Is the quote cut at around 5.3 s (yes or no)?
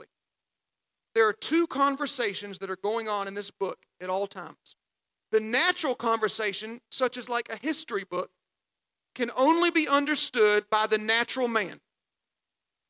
yes